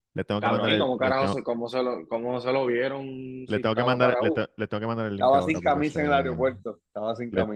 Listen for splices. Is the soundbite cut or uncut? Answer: uncut